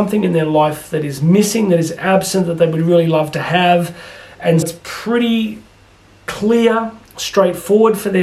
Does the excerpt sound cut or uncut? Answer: cut